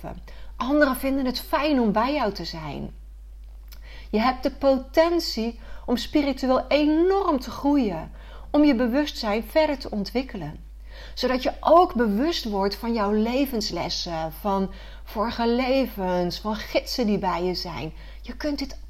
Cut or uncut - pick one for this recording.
uncut